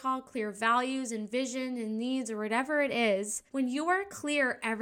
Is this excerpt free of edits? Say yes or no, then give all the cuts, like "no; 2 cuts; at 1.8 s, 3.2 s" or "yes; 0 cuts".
no; 1 cut; at 3.5 s